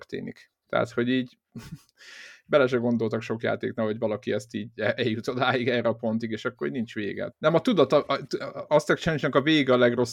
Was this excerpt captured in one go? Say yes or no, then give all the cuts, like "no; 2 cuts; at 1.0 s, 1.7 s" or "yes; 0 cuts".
no; 2 cuts; at 7.3 s, 8.7 s